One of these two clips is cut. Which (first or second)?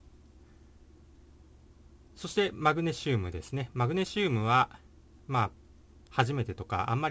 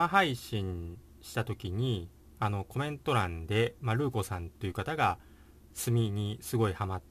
first